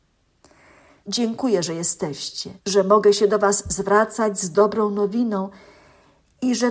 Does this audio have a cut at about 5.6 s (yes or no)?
no